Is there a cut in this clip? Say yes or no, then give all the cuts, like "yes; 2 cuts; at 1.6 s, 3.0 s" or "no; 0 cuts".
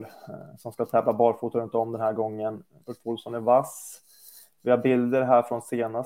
yes; 1 cut; at 2.8 s